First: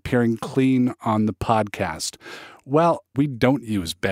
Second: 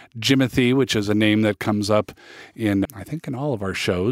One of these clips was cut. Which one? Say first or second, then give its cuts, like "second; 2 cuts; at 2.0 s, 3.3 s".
second; 1 cut; at 2.8 s